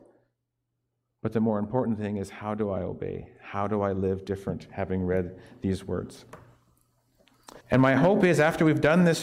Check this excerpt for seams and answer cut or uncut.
cut